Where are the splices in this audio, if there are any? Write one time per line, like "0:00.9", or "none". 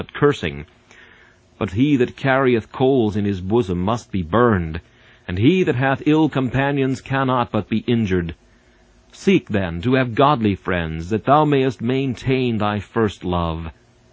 0:01.7